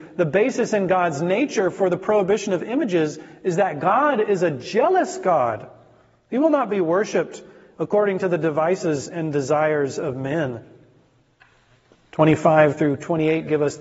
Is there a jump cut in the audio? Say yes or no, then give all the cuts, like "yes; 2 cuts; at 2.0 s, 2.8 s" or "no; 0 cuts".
no; 0 cuts